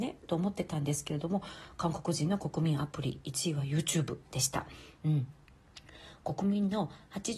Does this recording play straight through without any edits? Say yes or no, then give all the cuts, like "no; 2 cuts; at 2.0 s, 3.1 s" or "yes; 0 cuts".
no; 1 cut; at 5.0 s